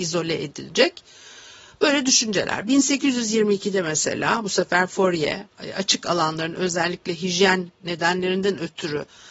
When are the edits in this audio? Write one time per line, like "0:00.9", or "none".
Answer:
none